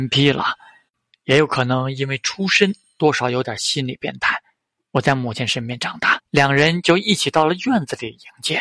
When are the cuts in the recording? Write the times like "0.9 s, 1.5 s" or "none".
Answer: 4.8 s, 6.2 s